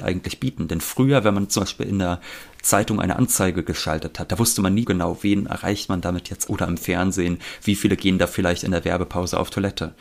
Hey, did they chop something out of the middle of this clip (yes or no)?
yes